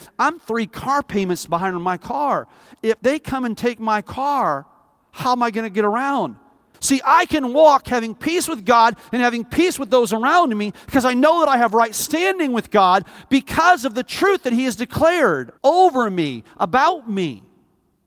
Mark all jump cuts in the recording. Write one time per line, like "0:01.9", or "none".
0:06.7
0:15.6